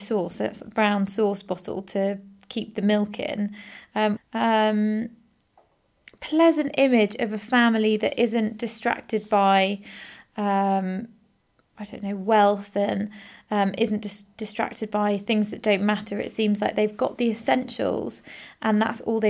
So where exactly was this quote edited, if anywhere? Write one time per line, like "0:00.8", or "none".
0:04.2
0:11.7